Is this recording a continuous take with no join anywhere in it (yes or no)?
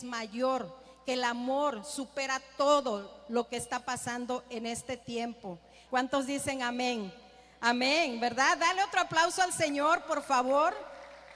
no